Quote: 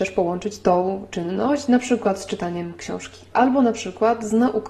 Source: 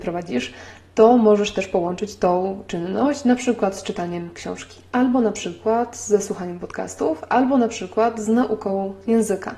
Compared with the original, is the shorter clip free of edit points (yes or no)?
no